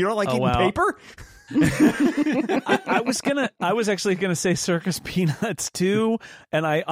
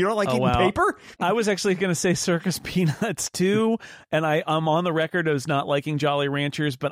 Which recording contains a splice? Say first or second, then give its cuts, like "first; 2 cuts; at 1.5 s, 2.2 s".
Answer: second; 1 cut; at 1.2 s